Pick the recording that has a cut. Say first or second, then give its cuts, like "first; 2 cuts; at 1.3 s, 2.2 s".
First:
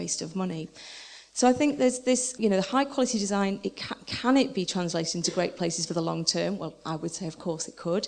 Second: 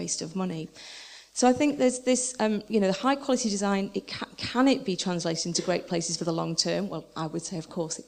first; 1 cut; at 2.4 s